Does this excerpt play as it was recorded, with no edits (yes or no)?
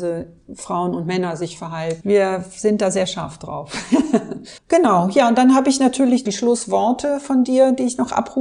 no